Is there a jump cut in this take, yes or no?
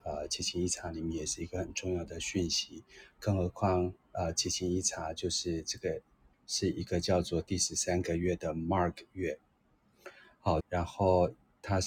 yes